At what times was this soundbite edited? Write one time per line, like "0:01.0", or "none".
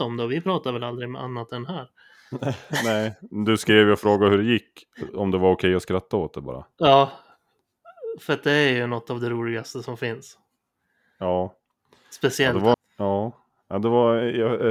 0:12.7